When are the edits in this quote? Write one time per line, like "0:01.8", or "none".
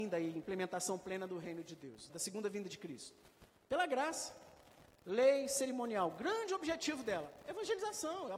0:02.1